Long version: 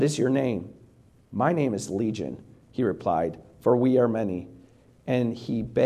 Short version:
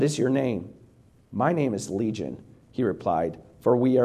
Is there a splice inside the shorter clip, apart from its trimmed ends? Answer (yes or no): no